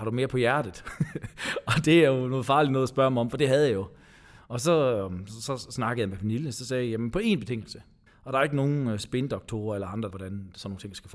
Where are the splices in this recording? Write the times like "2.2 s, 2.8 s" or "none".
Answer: 8.1 s, 10.1 s

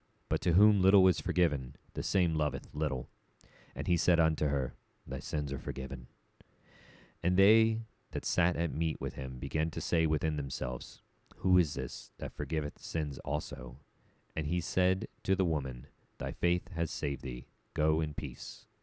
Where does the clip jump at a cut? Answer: none

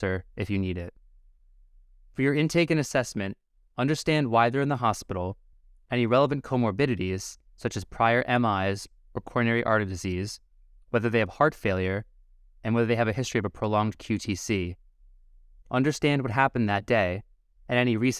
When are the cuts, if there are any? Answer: none

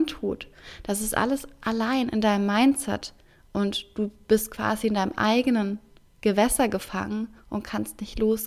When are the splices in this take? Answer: none

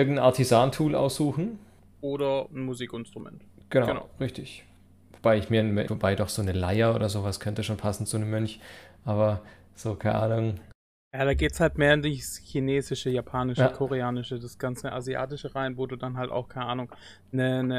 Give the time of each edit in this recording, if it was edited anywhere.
5.9 s

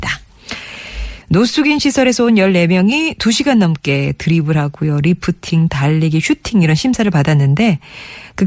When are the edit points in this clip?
1.2 s

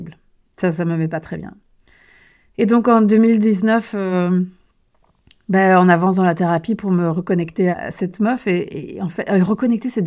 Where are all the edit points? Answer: 7.7 s

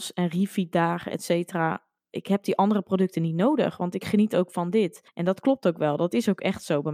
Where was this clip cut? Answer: none

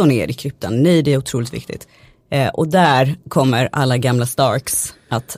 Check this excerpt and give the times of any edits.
none

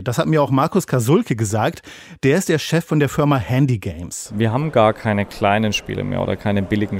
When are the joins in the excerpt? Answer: none

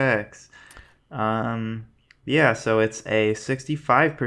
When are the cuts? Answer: 1.0 s

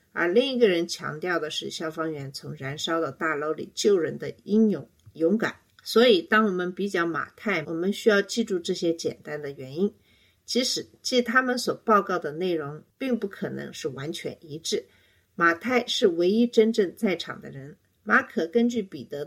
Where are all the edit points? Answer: 5.7 s, 7.6 s

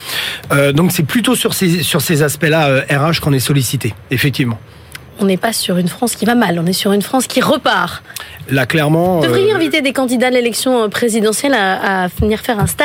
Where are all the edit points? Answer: none

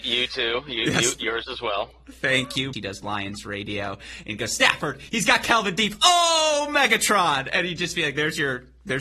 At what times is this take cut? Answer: 2.7 s

